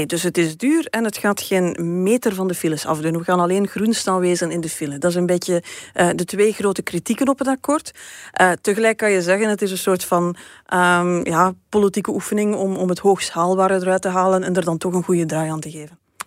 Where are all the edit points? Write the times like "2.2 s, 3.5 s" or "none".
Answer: none